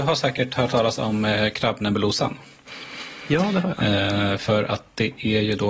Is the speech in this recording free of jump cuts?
yes; 0 cuts

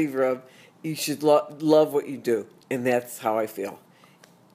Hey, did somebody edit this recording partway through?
no; 0 cuts

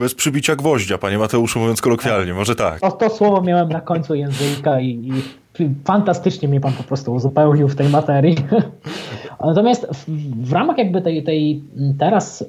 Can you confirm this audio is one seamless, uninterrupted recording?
no; 1 cut; at 2.8 s

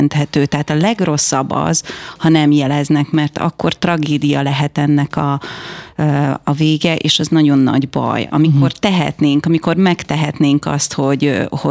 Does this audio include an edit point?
no; 0 cuts

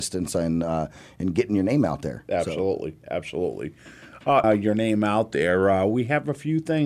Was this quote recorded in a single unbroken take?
no; 1 cut; at 4.4 s

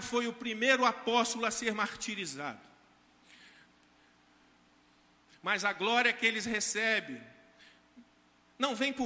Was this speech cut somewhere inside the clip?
yes; 1 cut; at 5.3 s

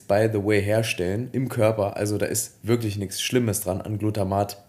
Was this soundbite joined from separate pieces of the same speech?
no; 0 cuts

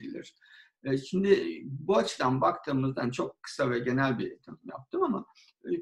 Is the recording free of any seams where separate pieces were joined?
yes; 0 cuts

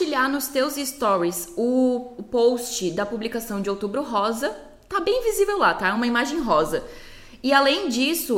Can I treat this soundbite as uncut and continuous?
yes; 0 cuts

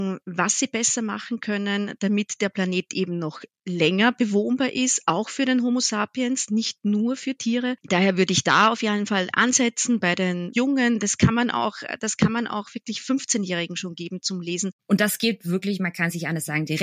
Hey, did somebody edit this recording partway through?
yes; 2 cuts; at 10.5 s, 14.8 s

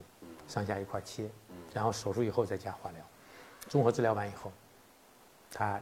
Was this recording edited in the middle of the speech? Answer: no; 0 cuts

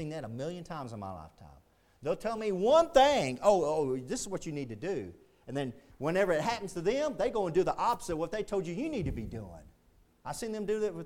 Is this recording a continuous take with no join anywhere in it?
yes; 0 cuts

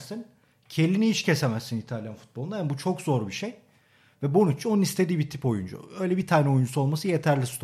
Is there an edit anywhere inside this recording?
no; 0 cuts

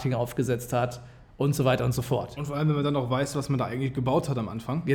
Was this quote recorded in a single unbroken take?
yes; 0 cuts

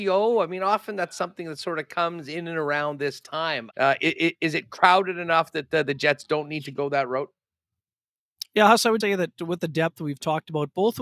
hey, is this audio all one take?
no; 2 cuts; at 3.7 s, 9.0 s

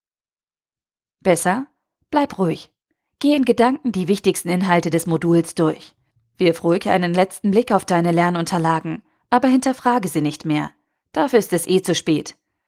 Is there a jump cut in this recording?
yes; 1 cut; at 1.0 s

